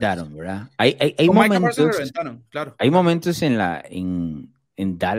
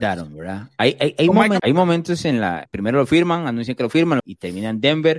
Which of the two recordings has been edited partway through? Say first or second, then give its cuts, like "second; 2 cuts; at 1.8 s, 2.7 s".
second; 3 cuts; at 1.6 s, 2.7 s, 4.2 s